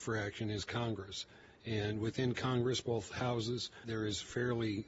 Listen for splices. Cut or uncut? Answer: cut